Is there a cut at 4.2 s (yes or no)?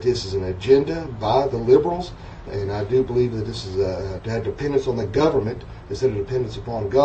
yes